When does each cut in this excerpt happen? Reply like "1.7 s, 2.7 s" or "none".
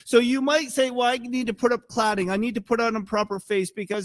none